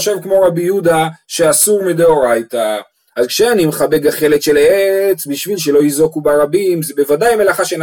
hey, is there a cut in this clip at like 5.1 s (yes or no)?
no